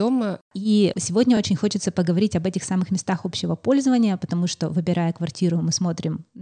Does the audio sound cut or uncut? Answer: uncut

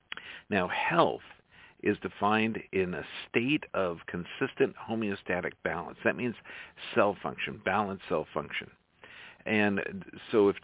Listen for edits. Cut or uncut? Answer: uncut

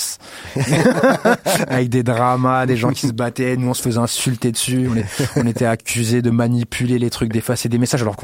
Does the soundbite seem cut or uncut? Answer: uncut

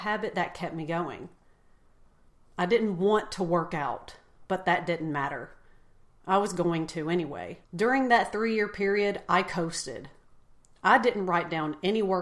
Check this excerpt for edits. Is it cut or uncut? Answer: cut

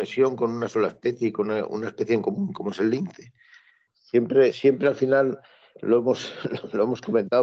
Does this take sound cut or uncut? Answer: cut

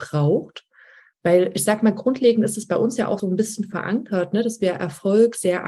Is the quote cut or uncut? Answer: cut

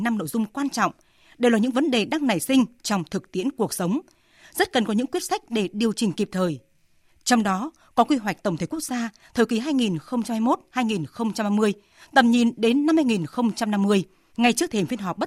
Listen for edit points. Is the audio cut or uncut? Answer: cut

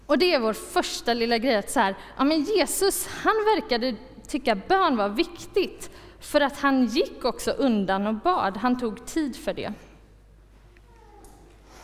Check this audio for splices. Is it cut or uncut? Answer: uncut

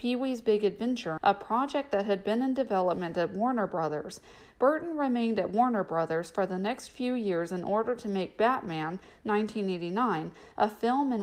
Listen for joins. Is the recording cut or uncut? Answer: cut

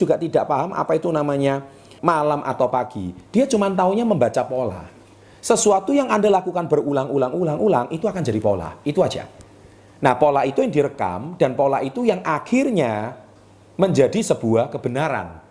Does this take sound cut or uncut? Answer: cut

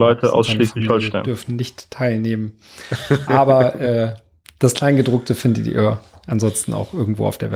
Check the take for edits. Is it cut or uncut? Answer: uncut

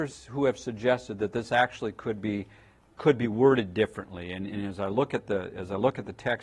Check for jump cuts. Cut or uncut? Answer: uncut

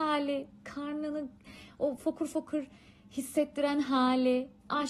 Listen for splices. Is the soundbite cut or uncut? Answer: uncut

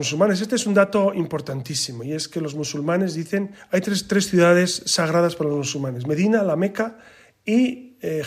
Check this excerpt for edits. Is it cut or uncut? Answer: uncut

